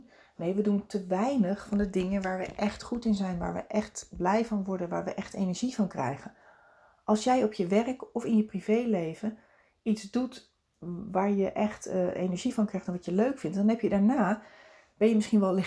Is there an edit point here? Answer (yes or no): no